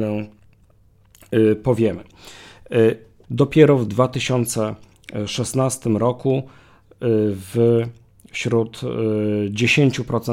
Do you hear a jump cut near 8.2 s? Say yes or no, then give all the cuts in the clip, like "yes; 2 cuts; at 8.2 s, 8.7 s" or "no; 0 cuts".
no; 1 cut; at 3.2 s